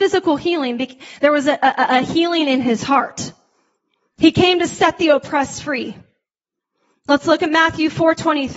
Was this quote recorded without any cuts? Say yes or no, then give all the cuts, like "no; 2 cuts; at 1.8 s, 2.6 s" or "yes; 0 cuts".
yes; 0 cuts